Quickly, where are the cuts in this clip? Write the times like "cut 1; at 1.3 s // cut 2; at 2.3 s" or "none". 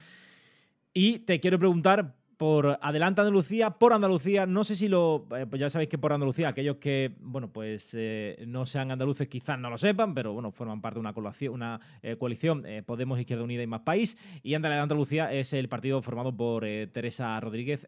none